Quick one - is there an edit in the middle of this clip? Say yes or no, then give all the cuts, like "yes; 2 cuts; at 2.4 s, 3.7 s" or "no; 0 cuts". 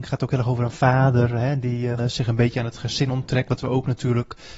yes; 1 cut; at 2.0 s